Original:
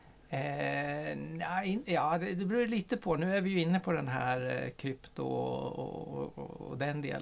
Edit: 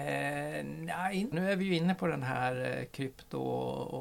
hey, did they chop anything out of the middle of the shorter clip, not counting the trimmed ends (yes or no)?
yes